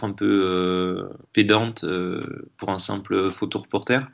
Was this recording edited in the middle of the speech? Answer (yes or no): yes